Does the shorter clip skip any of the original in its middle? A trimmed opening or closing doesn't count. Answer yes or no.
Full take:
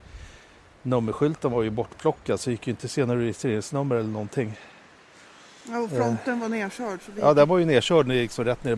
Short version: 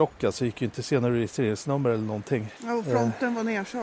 yes